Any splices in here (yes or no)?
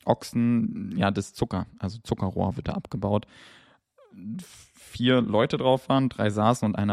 no